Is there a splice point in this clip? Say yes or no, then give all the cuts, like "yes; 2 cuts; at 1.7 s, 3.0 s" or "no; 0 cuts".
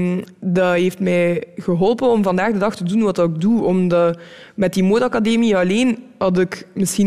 no; 0 cuts